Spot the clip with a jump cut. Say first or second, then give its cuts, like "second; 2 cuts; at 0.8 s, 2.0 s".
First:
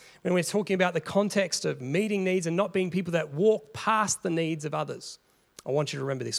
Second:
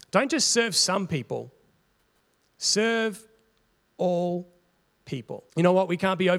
second; 1 cut; at 5.5 s